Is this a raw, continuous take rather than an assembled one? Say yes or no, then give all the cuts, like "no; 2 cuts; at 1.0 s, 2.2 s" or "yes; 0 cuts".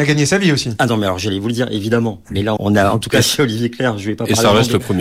no; 1 cut; at 2.6 s